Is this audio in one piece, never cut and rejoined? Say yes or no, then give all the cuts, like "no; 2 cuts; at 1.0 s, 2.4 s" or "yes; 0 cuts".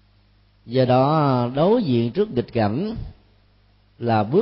yes; 0 cuts